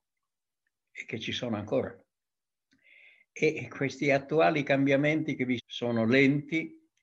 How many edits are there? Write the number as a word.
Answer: one